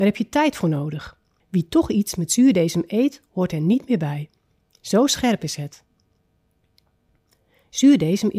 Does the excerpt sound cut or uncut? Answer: cut